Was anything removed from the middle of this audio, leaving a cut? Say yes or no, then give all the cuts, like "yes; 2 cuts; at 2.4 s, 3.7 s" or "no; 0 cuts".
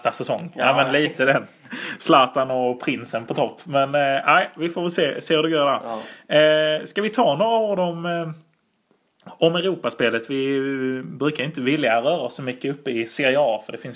no; 0 cuts